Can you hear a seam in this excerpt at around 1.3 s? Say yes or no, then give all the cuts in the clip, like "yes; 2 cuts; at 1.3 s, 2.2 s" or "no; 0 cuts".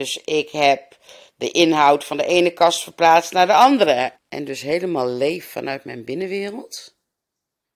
no; 1 cut; at 4.1 s